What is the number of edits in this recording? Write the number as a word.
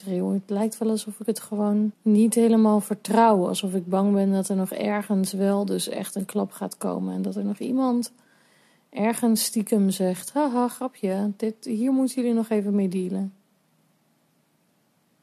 one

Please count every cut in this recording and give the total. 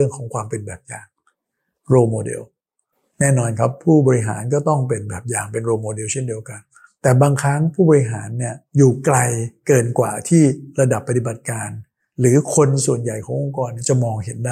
one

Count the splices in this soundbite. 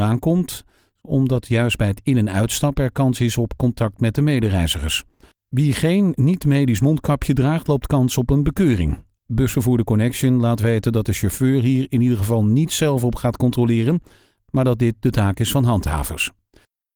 one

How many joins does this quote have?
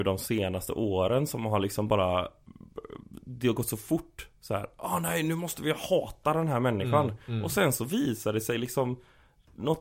zero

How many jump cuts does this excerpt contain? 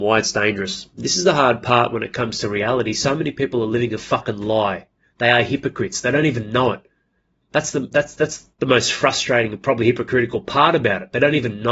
one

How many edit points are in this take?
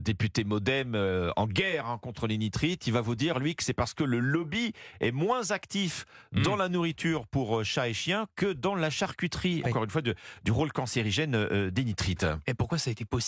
one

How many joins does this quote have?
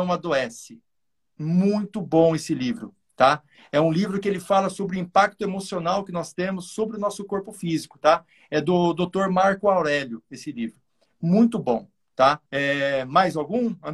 one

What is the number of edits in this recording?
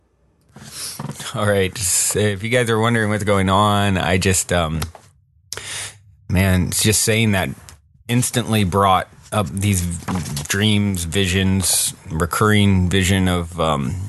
zero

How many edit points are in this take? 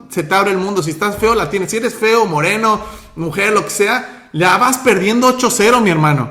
zero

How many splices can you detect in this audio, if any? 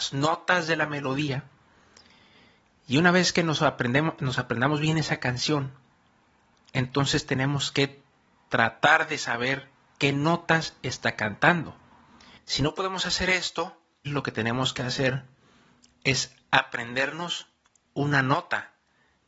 two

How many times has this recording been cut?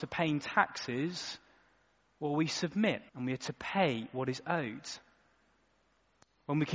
one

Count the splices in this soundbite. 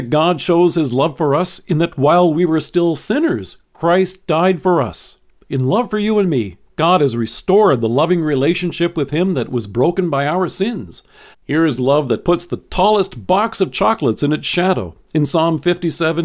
one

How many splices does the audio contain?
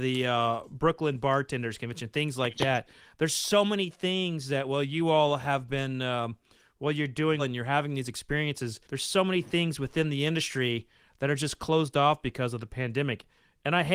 two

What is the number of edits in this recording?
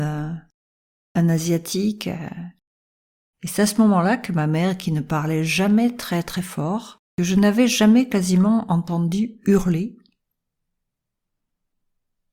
two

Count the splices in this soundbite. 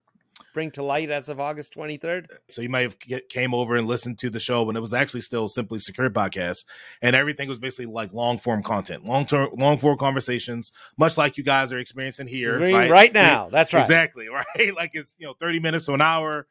one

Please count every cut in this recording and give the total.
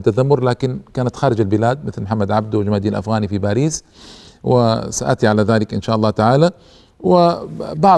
zero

